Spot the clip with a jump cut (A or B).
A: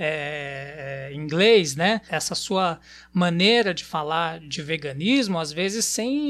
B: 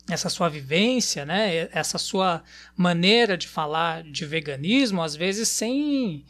A